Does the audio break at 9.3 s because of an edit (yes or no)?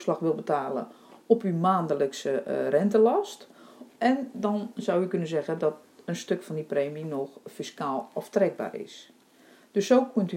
no